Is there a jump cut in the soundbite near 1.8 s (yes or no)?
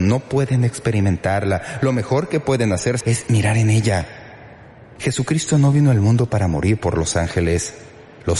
no